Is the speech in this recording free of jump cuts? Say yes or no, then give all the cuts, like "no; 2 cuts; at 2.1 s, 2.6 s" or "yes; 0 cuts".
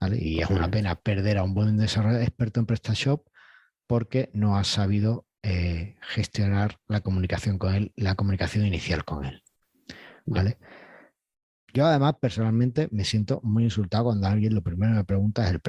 yes; 0 cuts